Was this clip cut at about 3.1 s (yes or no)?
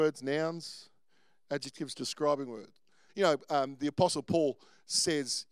yes